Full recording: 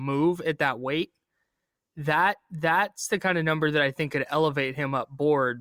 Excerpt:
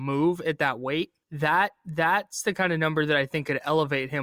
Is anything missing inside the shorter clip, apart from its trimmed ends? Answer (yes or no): yes